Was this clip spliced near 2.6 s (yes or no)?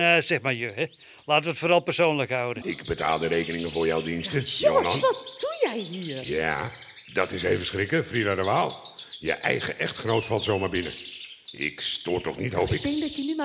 yes